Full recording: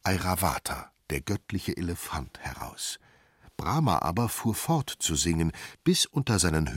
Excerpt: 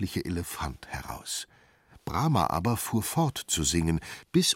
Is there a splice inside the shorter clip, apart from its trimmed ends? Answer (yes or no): no